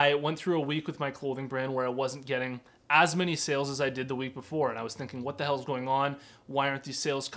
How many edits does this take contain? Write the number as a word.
zero